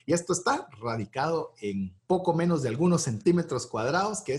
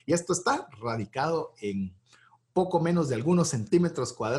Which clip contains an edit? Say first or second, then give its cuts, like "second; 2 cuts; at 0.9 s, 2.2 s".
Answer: first; 1 cut; at 2.0 s